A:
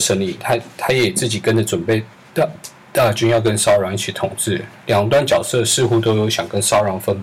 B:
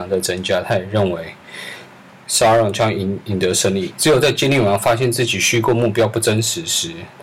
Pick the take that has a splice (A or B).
B